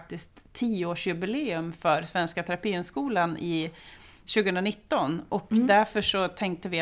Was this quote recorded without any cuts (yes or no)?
yes